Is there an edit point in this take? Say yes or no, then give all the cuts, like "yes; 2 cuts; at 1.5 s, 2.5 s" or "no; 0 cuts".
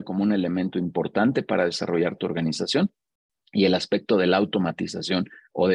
no; 0 cuts